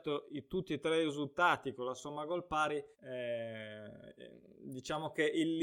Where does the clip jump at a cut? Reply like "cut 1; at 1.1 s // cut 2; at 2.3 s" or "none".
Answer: cut 1; at 2.9 s